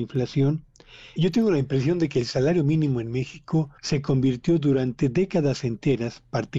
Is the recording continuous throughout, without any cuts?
no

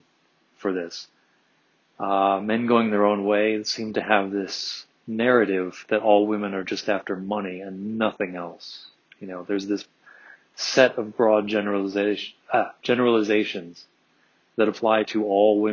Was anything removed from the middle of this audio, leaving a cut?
no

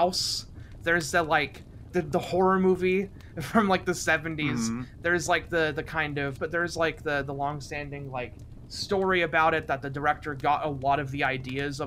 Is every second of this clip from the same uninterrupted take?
no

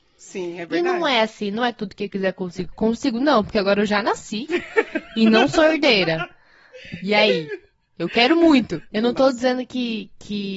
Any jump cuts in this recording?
yes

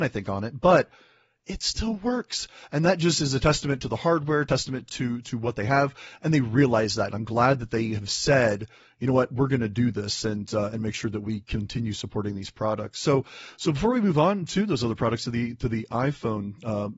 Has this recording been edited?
no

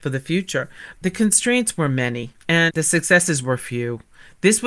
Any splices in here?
yes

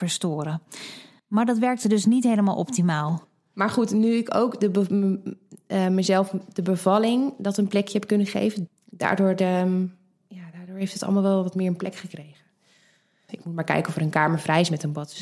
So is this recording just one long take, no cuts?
no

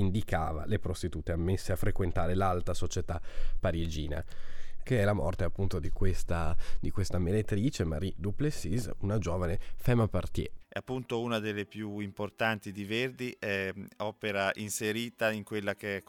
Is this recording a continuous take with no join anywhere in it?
no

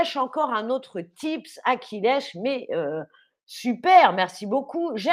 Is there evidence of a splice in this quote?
no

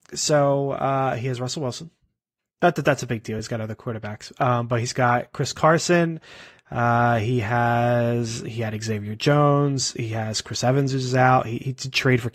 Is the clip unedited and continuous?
yes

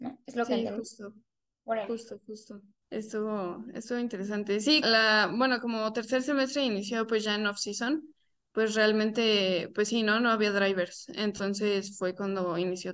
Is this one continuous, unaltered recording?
no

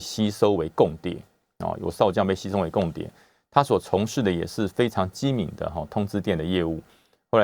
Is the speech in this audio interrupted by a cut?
no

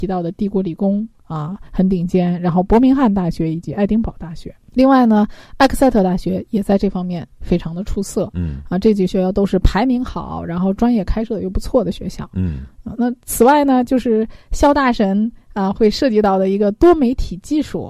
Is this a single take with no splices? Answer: yes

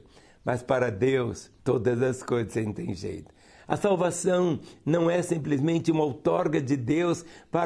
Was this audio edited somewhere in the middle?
yes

